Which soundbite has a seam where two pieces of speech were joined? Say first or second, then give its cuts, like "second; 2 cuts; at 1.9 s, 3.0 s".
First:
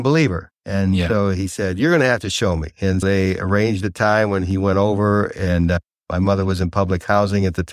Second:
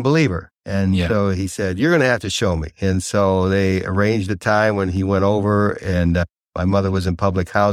first; 1 cut; at 3.0 s